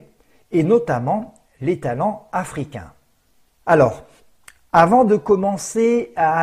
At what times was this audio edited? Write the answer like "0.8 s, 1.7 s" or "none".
none